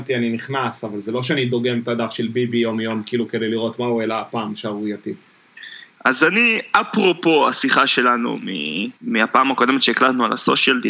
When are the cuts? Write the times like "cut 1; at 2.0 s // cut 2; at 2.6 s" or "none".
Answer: cut 1; at 5.9 s // cut 2; at 9.0 s